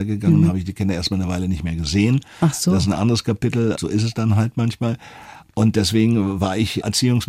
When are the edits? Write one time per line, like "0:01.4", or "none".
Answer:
0:03.8